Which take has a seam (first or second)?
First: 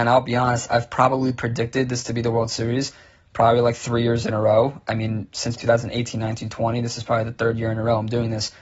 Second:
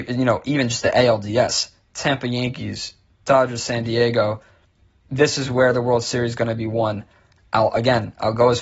first